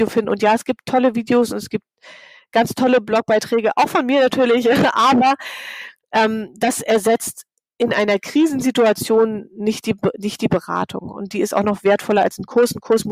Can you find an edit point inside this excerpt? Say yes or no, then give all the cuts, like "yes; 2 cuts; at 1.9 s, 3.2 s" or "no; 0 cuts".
no; 0 cuts